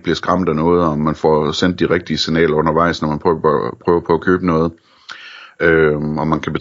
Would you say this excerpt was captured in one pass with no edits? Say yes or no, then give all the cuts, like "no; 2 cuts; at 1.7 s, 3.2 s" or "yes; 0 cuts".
yes; 0 cuts